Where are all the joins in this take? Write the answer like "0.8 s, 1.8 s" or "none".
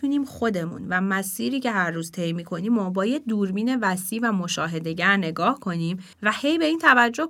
6.1 s